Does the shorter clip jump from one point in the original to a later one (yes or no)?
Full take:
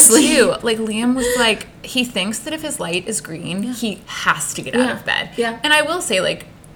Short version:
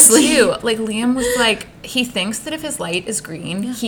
no